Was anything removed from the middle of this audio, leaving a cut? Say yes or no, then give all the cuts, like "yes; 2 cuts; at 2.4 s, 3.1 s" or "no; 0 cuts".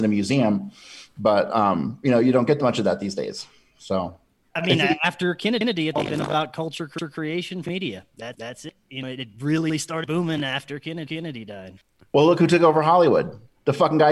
no; 0 cuts